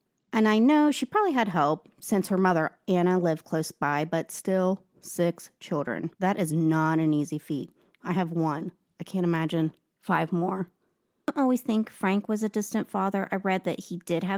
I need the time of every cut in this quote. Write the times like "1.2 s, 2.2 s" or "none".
6.1 s